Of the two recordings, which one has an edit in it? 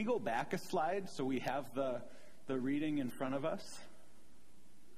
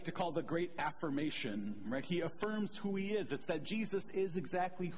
second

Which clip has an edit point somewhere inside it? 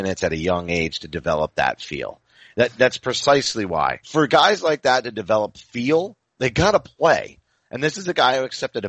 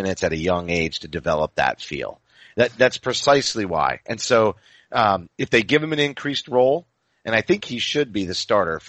first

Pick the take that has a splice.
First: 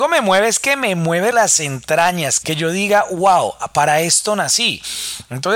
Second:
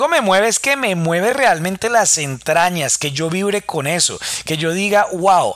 first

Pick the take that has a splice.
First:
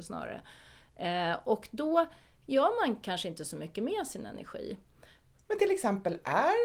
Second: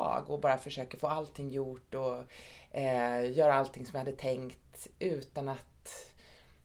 first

